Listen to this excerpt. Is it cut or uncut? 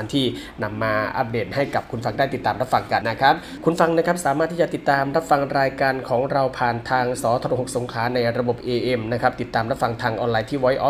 cut